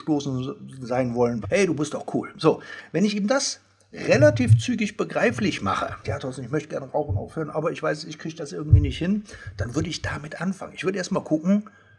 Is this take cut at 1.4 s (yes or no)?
yes